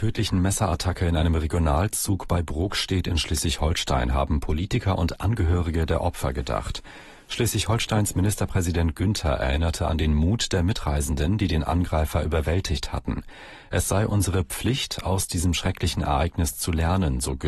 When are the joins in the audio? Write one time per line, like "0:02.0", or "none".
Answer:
none